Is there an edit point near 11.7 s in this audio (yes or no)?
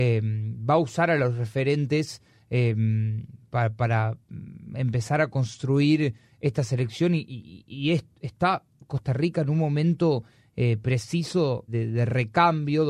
yes